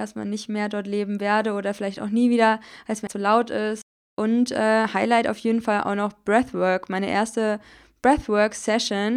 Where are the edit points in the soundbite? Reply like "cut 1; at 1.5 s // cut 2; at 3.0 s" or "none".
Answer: cut 1; at 3.1 s